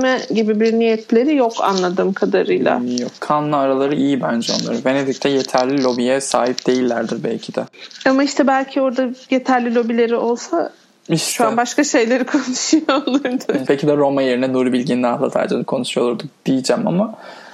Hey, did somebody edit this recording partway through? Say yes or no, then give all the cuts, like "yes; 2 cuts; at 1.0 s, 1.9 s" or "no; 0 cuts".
yes; 1 cut; at 13.7 s